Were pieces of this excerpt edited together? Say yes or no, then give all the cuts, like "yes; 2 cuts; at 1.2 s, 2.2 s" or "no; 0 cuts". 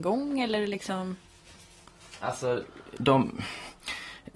yes; 1 cut; at 3.0 s